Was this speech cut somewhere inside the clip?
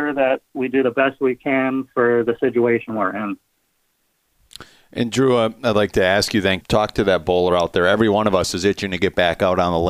yes; 1 cut; at 6.6 s

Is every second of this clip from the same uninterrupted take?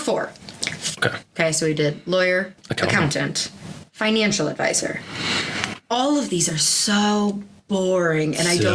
no; 2 cuts; at 1.0 s, 2.6 s

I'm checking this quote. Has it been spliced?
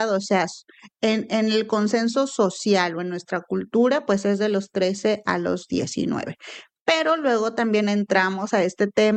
no; 0 cuts

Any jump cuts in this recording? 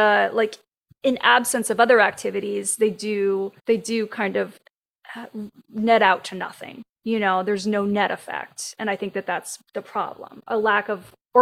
yes; 1 cut; at 3.6 s

